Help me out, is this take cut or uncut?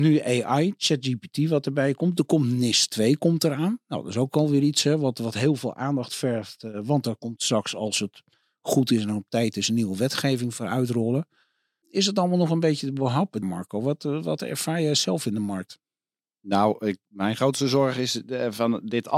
cut